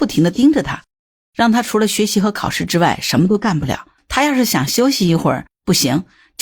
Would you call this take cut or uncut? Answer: cut